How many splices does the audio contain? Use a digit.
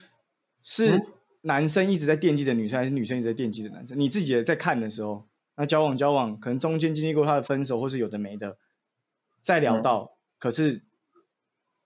1